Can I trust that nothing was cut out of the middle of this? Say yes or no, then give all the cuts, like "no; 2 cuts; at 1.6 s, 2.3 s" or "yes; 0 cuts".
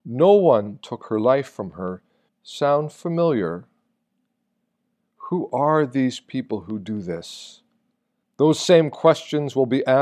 no; 2 cuts; at 2.3 s, 8.2 s